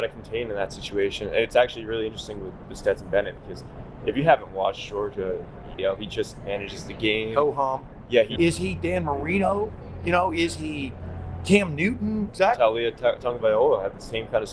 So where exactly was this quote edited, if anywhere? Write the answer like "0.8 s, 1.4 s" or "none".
5.8 s, 8.4 s, 12.3 s